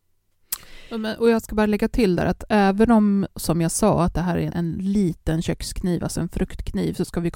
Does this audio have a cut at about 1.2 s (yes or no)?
no